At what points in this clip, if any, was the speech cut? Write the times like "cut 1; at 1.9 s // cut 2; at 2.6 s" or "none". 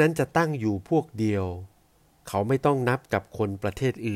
none